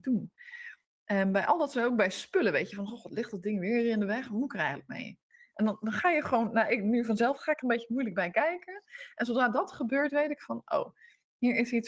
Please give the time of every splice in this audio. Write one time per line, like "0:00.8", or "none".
0:07.4